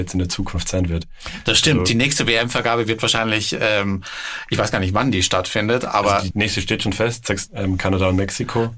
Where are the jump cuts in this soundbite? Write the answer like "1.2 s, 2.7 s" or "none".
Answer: 6.3 s, 7.5 s